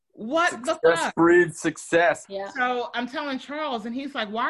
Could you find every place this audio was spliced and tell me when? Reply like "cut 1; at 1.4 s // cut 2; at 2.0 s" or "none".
cut 1; at 2.2 s